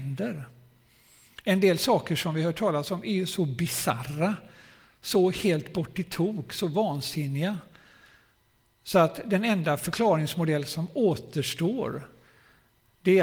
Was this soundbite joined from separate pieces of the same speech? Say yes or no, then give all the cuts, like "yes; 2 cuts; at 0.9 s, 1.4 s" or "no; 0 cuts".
no; 0 cuts